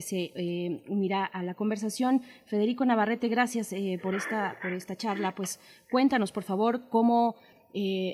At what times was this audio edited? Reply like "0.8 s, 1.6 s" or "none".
none